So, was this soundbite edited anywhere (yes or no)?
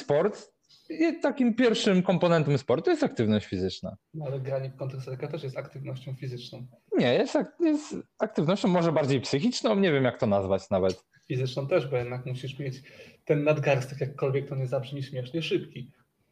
no